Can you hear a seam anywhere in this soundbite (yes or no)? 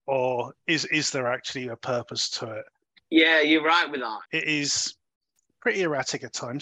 yes